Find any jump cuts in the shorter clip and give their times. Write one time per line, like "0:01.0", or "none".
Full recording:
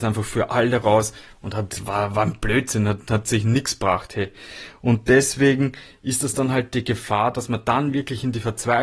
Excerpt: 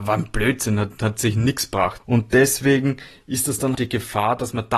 0:02.0
0:03.7

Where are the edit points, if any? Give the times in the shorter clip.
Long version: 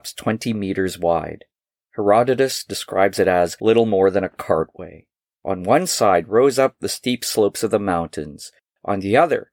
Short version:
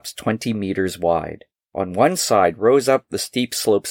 0:01.6

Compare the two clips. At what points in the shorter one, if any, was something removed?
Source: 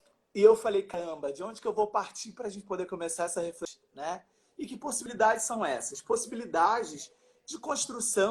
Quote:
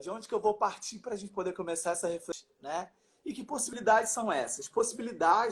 none

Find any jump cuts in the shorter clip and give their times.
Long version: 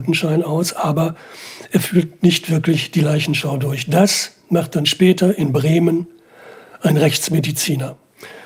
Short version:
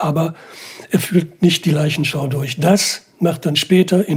0:01.6

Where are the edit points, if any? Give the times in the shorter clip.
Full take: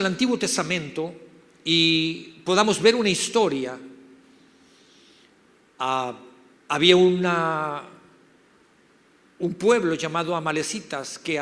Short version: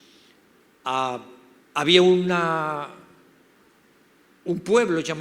none

